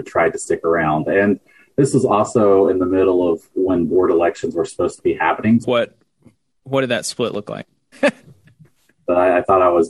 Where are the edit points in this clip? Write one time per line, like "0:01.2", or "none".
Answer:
0:05.6
0:07.9